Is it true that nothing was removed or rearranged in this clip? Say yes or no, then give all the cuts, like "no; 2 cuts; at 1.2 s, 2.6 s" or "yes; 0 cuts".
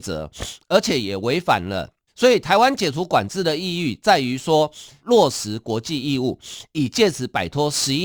no; 2 cuts; at 2.1 s, 5.0 s